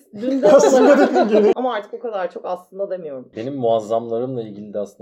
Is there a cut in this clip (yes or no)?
yes